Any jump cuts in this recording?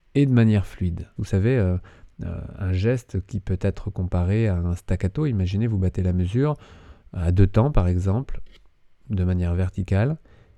yes; 1 cut; at 1.2 s

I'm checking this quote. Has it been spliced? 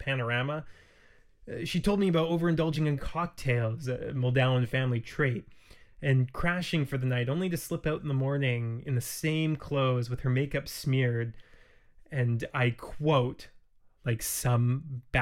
no; 0 cuts

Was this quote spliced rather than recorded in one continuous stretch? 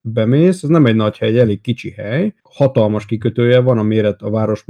yes; 1 cut; at 2.4 s

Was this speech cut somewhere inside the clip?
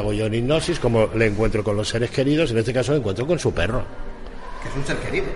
no; 0 cuts

